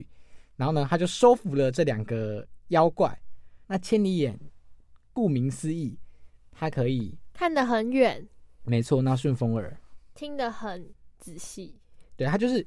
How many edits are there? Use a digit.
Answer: 1